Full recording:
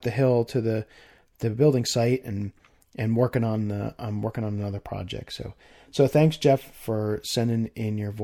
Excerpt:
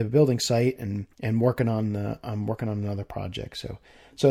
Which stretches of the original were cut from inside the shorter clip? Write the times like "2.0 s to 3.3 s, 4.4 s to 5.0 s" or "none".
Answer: 2.6 s to 2.9 s